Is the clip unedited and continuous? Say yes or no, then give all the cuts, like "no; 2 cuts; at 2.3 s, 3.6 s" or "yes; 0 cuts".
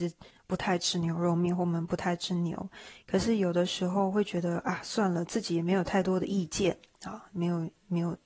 yes; 0 cuts